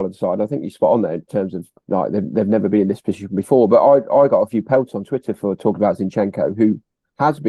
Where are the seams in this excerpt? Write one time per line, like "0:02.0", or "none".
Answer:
0:01.8